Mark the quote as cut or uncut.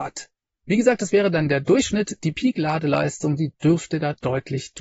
uncut